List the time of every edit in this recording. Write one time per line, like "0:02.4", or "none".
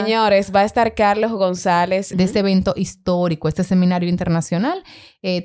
0:02.1